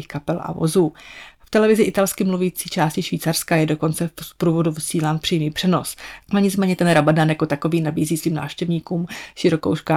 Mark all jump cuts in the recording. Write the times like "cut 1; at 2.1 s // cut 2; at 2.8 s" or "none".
cut 1; at 6.2 s